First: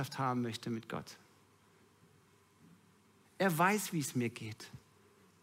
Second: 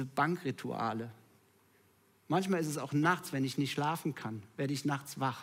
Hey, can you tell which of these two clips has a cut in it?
first; 1 cut; at 3.2 s

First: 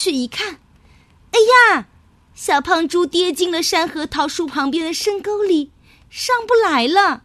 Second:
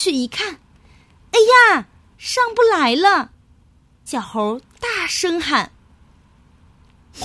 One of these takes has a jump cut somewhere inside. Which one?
second; 2 cuts; at 2.1 s, 4.1 s

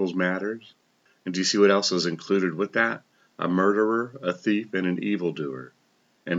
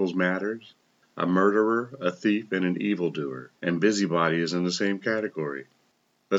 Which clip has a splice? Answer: second; 2 cuts; at 1.0 s, 3.6 s

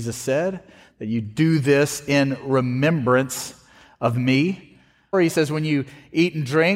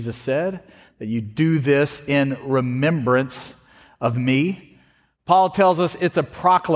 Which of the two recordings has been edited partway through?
first; 1 cut; at 5.1 s

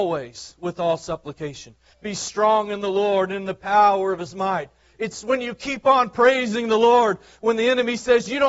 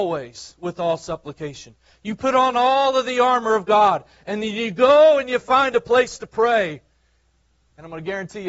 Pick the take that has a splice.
first; 1 cut; at 1.9 s

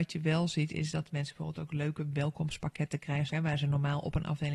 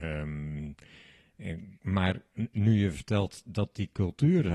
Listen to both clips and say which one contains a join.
first; 1 cut; at 3.3 s

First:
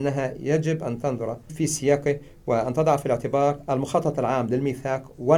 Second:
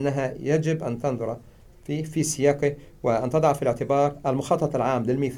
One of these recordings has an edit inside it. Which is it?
first; 1 cut; at 1.5 s

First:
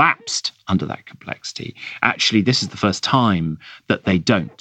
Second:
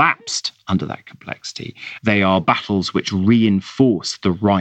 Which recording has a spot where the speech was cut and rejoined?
second; 1 cut; at 2.0 s

